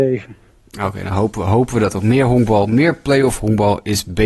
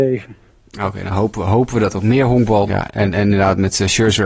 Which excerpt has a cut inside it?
second; 1 cut; at 2.7 s

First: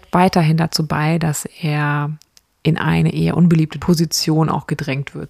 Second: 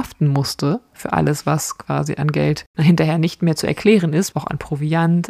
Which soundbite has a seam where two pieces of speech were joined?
second; 1 cut; at 4.3 s

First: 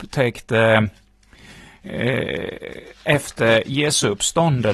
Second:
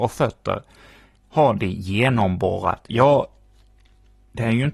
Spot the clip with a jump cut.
second; 1 cut; at 2.9 s

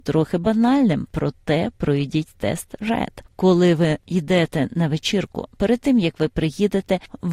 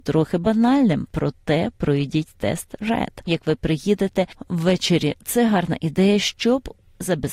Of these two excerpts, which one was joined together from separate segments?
second; 1 cut; at 3.3 s

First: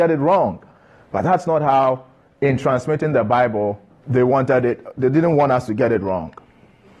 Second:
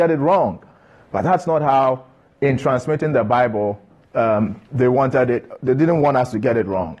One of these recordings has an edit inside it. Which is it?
first; 1 cut; at 4.0 s

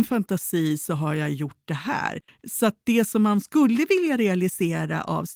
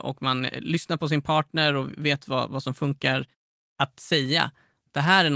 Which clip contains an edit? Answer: first; 1 cut; at 2.3 s

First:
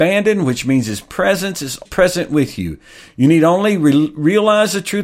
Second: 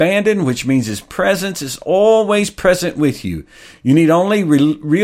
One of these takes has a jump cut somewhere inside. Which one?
first; 1 cut; at 1.8 s

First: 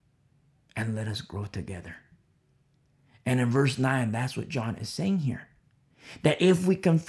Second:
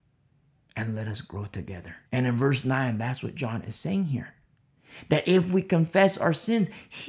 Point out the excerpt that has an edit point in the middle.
second; 1 cut; at 2.1 s

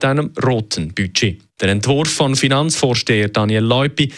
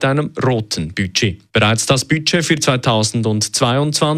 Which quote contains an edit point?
second; 1 cut; at 1.5 s

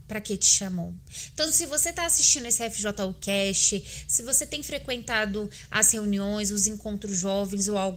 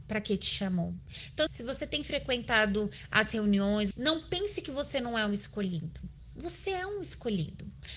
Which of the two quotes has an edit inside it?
second; 2 cuts; at 1.5 s, 3.9 s

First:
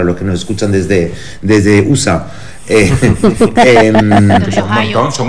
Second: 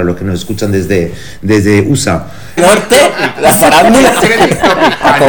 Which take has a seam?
second; 1 cut; at 2.6 s

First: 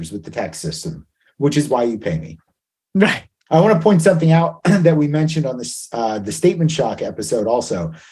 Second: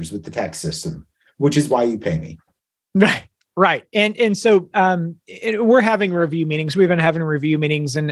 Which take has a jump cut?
first; 1 cut; at 3.5 s

